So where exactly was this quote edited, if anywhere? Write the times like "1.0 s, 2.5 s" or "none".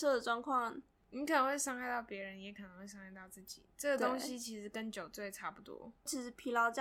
none